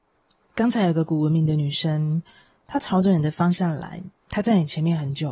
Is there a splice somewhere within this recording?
yes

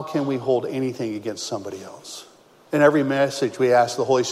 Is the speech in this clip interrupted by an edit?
yes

